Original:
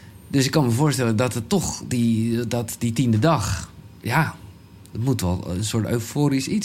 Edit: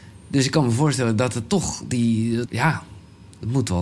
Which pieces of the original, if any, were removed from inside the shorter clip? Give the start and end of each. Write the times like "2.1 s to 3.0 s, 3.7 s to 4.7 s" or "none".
2.5 s to 4.0 s